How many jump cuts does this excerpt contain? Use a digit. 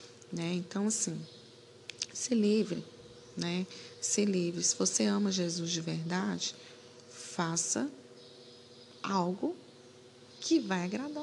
0